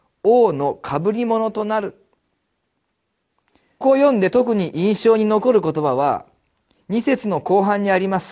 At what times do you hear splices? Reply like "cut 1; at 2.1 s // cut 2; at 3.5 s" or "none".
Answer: cut 1; at 3.8 s